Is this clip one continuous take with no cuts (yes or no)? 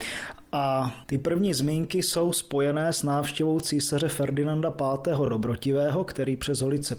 yes